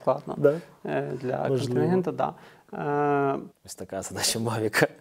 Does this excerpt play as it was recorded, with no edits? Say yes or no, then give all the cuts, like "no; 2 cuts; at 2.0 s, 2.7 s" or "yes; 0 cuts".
no; 1 cut; at 3.5 s